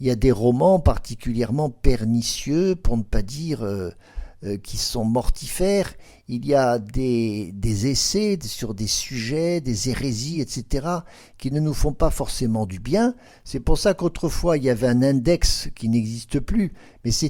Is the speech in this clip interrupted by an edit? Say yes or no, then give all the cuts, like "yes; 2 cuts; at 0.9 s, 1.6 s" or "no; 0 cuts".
no; 0 cuts